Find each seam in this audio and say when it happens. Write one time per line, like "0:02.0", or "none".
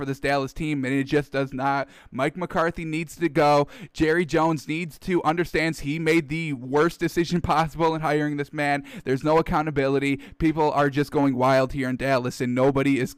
none